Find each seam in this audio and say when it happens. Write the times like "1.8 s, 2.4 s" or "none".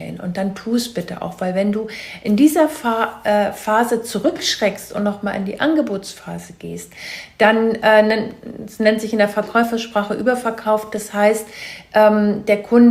none